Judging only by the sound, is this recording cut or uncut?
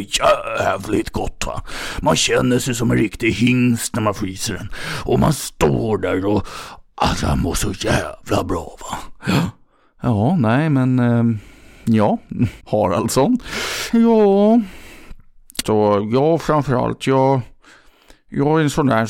cut